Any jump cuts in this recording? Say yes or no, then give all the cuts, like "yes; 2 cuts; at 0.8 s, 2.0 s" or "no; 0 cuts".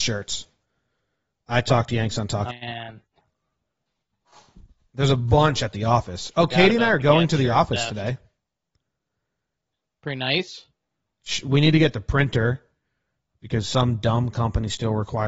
yes; 1 cut; at 2.5 s